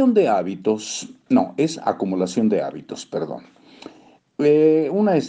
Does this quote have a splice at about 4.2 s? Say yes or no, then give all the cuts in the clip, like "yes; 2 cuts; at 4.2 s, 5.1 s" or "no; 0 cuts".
yes; 1 cut; at 4.2 s